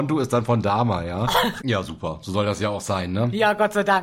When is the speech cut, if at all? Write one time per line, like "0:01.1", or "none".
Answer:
0:01.6